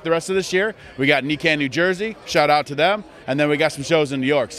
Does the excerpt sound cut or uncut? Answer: uncut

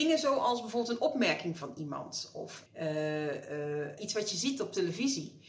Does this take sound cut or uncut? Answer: cut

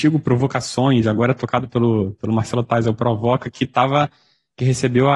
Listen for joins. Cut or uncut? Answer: uncut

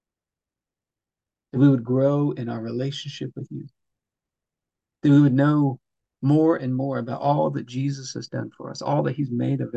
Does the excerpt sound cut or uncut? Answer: uncut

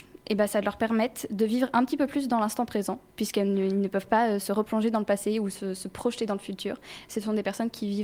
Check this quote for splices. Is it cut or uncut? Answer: cut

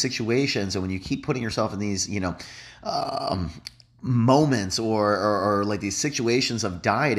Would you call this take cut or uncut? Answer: uncut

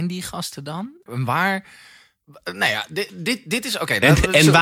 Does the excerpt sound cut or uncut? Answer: cut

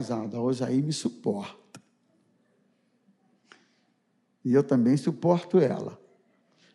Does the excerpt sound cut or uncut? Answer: uncut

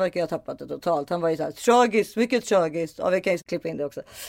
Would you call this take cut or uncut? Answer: uncut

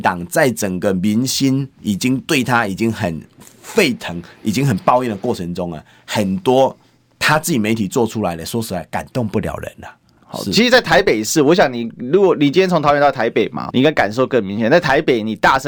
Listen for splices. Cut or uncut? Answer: cut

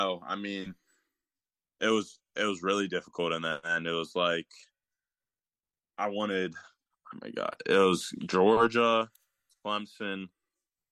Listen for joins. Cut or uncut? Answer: uncut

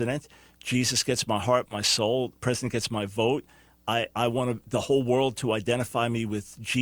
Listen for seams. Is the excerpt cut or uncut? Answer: cut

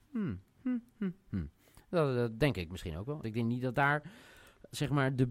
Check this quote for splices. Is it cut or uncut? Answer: cut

